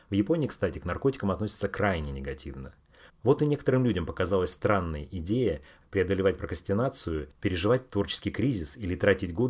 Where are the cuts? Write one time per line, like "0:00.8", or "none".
0:03.1